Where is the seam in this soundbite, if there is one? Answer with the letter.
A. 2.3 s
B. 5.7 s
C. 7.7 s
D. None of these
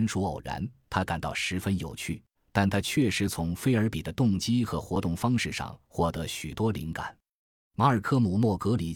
A